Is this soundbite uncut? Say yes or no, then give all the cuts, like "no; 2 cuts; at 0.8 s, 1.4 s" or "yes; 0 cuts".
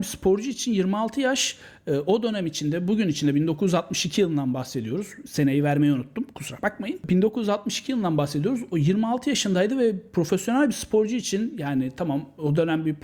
yes; 0 cuts